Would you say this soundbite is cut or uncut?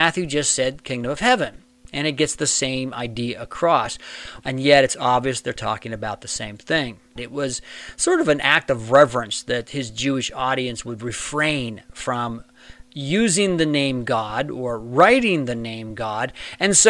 cut